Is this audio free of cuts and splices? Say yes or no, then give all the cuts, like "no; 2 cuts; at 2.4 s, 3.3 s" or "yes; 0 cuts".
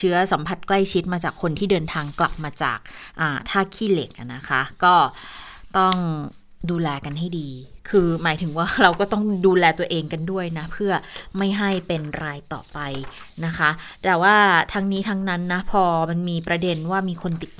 yes; 0 cuts